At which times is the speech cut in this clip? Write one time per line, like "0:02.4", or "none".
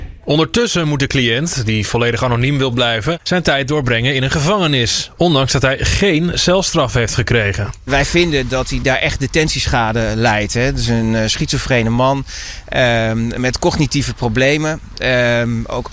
none